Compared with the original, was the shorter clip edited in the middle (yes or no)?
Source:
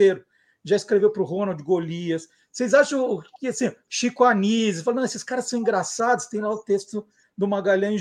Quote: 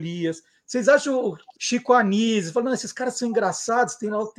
yes